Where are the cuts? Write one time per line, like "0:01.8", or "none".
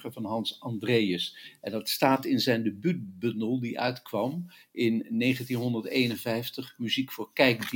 none